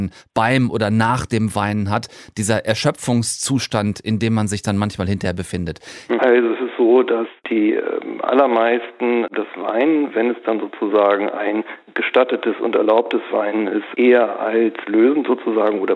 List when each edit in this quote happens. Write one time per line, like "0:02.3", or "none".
0:06.2